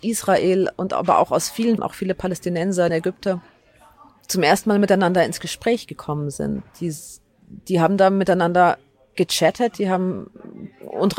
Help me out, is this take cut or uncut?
cut